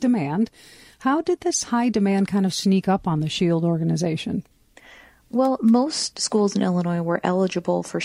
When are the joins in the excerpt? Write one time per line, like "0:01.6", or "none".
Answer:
none